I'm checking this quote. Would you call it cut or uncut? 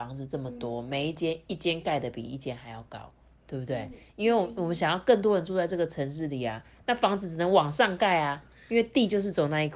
uncut